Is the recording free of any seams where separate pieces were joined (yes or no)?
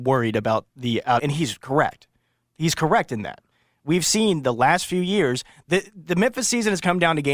no